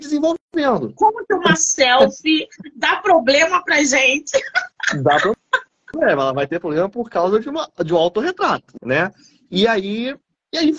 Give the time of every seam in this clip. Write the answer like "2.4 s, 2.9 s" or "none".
1.0 s, 8.8 s